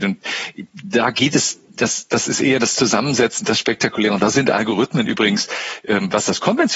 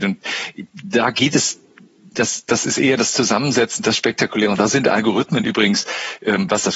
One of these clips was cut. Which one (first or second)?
first